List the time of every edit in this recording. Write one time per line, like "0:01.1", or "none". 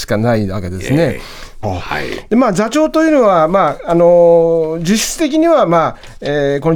0:01.6